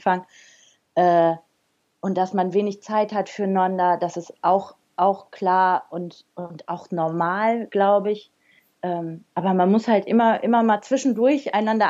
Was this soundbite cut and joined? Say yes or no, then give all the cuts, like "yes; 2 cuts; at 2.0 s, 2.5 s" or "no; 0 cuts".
no; 0 cuts